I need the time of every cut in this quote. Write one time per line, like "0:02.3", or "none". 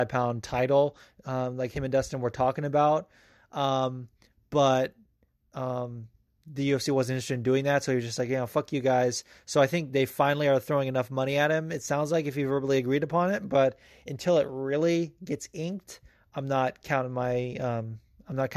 none